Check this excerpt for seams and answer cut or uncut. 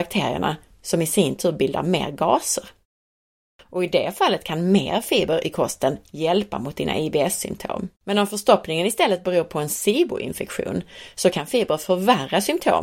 cut